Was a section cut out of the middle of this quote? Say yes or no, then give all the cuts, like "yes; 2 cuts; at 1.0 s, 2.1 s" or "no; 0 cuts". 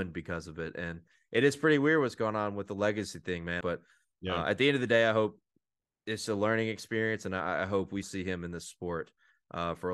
yes; 2 cuts; at 3.6 s, 8.0 s